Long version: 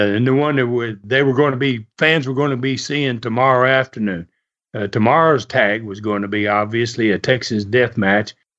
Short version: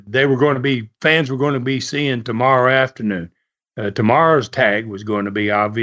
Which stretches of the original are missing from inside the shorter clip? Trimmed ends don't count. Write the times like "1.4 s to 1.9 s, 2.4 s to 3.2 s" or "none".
none